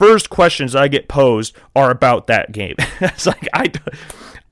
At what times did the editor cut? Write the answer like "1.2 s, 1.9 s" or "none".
none